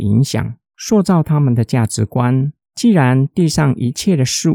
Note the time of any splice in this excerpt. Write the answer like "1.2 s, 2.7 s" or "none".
2.6 s